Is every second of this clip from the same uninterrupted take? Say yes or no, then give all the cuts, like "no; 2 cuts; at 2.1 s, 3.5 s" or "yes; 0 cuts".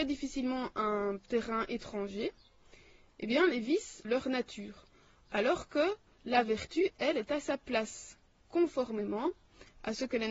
no; 1 cut; at 4.0 s